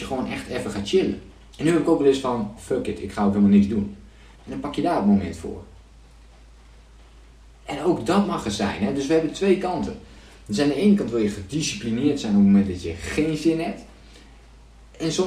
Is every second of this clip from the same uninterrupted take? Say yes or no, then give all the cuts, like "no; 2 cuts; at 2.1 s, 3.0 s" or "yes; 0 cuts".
no; 3 cuts; at 1.5 s, 2.6 s, 4.4 s